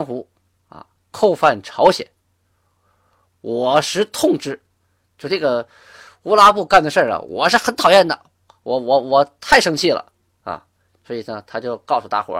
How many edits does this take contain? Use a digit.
0